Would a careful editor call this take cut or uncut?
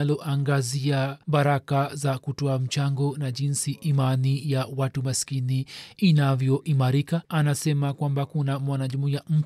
cut